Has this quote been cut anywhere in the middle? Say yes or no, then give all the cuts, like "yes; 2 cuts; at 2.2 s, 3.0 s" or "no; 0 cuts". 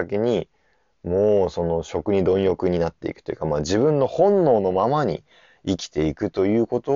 no; 0 cuts